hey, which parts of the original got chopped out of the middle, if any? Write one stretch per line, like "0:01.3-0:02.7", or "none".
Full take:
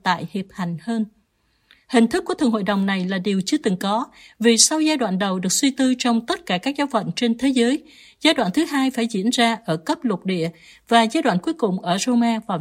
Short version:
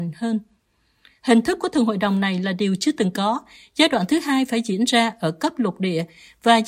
0:04.2-0:08.0